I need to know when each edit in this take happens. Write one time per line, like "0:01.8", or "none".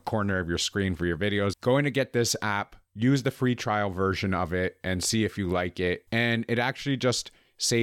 0:01.5
0:06.1